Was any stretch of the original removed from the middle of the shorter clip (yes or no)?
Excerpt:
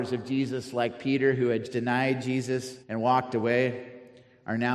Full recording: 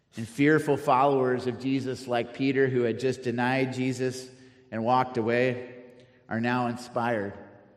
yes